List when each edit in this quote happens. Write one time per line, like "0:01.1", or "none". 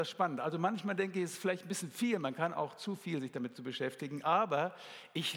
none